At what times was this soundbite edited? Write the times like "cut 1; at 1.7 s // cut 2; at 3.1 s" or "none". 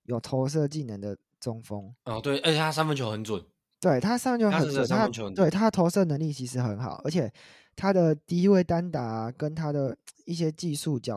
none